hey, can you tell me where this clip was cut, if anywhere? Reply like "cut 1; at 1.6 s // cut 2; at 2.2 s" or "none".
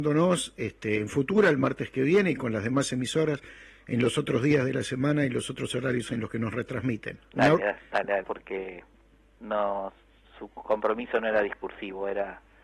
cut 1; at 8.2 s